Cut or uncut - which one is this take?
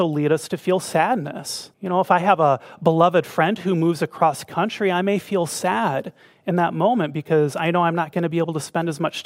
cut